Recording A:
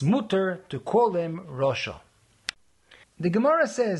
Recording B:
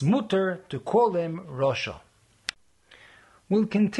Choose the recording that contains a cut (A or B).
A